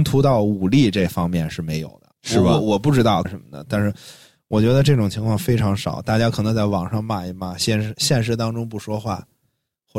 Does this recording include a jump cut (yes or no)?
yes